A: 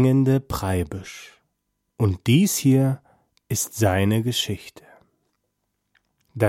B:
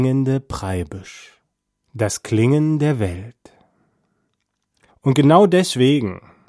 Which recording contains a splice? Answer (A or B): B